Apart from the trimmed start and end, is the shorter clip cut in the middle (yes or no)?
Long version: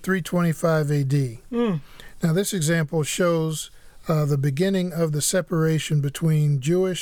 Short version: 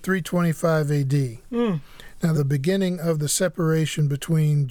yes